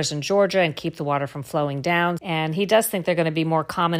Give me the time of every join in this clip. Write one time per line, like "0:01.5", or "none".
0:02.2